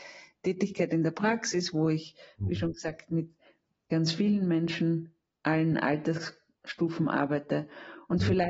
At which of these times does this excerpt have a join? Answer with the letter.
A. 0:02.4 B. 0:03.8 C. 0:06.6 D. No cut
D